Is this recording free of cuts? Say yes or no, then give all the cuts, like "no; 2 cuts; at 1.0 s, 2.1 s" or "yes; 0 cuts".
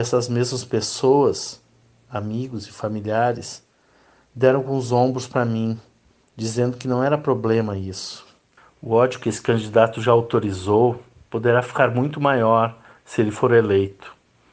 yes; 0 cuts